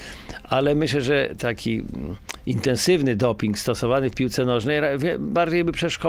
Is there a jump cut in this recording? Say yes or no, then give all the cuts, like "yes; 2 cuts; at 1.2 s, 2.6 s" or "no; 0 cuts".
yes; 1 cut; at 1.4 s